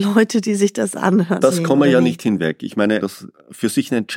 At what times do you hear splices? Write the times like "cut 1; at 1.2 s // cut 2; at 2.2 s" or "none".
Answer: cut 1; at 1.4 s // cut 2; at 3.0 s